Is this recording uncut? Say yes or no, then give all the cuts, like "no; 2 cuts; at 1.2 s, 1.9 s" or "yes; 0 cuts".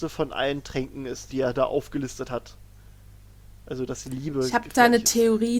no; 1 cut; at 1.3 s